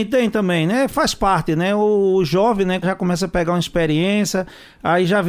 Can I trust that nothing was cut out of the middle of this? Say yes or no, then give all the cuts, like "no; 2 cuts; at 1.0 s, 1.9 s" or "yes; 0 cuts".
no; 1 cut; at 2.8 s